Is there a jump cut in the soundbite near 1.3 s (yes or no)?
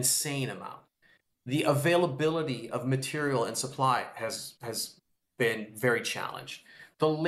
yes